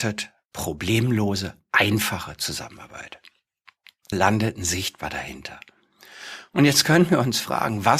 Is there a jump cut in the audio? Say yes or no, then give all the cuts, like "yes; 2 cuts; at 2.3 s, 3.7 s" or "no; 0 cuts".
yes; 1 cut; at 4.1 s